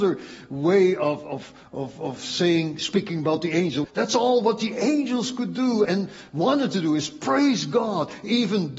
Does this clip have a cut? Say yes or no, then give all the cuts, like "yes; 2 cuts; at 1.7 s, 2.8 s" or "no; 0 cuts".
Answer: yes; 2 cuts; at 3.8 s, 5.8 s